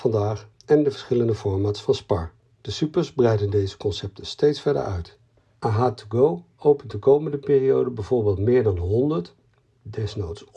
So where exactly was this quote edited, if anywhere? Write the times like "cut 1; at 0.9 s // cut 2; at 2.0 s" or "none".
none